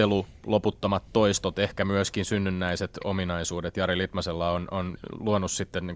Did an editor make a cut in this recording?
no; 0 cuts

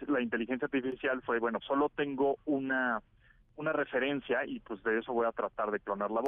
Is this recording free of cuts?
no; 1 cut; at 1.6 s

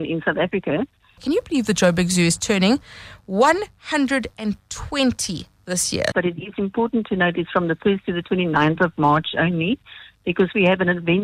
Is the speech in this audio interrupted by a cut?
yes; 2 cuts; at 1.2 s, 6.1 s

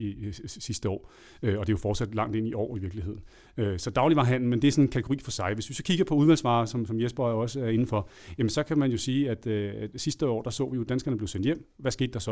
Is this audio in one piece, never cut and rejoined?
yes; 0 cuts

